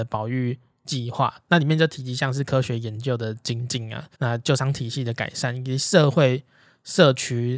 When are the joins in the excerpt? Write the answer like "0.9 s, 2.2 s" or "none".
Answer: 4.1 s